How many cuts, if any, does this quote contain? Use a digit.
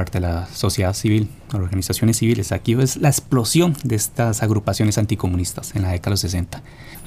0